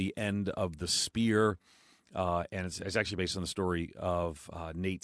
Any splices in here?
no; 0 cuts

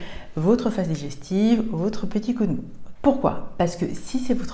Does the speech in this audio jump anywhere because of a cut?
yes; 1 cut; at 3.0 s

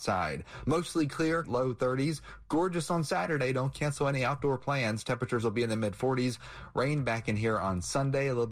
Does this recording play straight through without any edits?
no; 1 cut; at 1.4 s

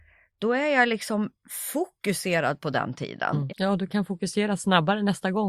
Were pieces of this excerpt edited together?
yes; 1 cut; at 3.5 s

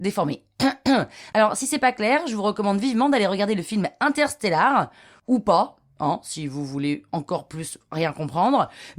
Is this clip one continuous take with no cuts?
yes; 0 cuts

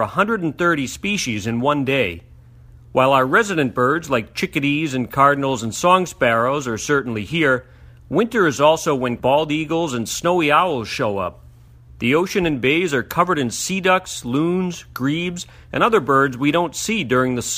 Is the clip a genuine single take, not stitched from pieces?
yes; 0 cuts

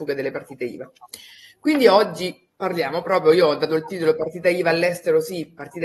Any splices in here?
no; 0 cuts

